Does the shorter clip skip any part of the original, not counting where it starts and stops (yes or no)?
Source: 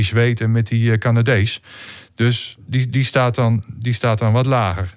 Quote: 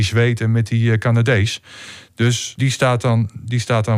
yes